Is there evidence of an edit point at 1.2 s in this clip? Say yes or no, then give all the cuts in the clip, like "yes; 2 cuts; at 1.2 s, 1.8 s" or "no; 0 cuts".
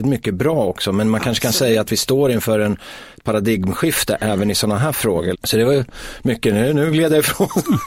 no; 1 cut; at 5.3 s